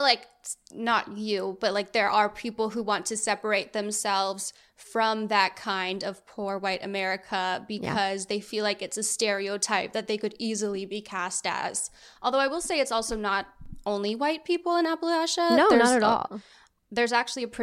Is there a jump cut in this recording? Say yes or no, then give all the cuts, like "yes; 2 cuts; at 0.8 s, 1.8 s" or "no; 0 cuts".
no; 0 cuts